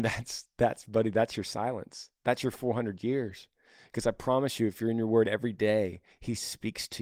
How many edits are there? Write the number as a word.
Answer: one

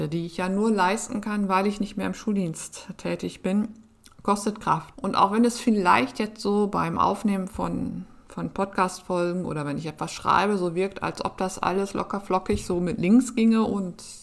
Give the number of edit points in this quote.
one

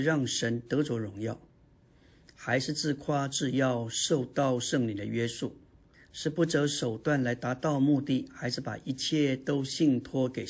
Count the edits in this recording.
one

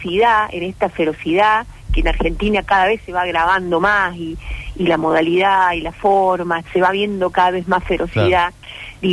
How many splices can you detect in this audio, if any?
one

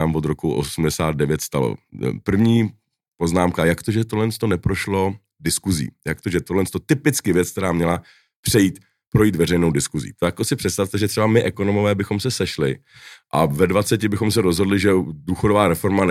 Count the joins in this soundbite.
one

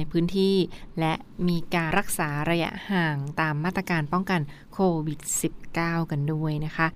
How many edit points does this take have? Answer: one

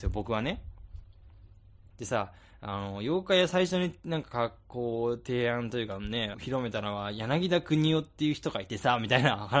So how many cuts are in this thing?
two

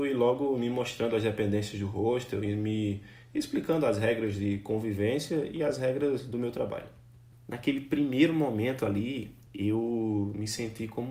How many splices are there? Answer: two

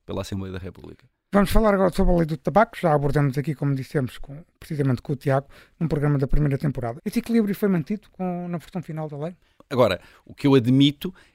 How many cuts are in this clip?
two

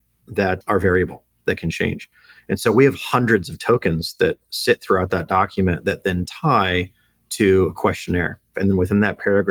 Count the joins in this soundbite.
one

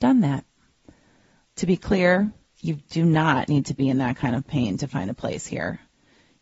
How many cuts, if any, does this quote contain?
one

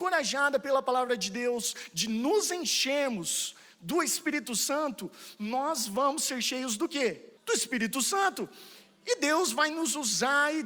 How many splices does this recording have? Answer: one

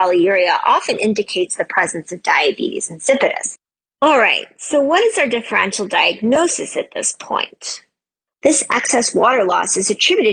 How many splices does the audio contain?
two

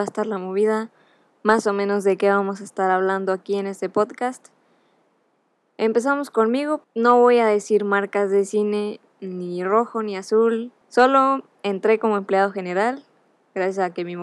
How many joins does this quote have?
two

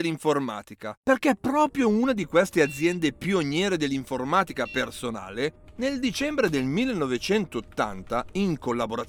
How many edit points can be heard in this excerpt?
two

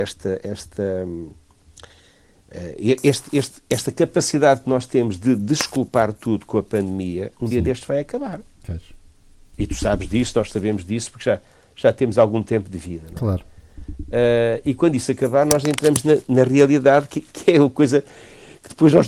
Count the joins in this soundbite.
zero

